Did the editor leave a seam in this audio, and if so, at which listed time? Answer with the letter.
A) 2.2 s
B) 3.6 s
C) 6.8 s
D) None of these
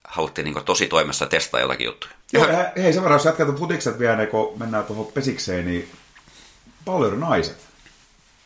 A